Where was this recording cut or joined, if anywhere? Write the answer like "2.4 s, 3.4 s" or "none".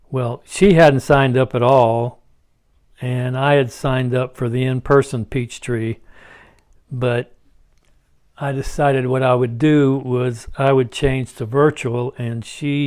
none